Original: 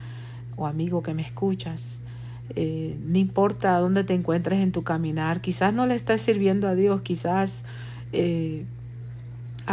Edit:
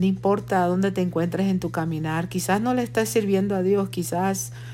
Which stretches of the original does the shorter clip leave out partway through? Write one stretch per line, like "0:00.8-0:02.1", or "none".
none